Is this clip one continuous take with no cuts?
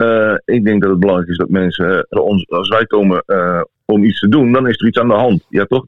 no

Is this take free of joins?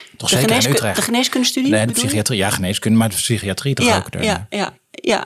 yes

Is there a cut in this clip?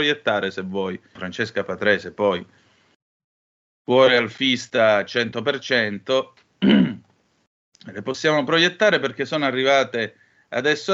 yes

